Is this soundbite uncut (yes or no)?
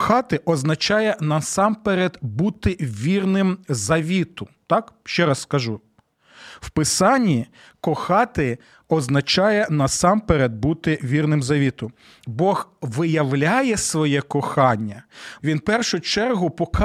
no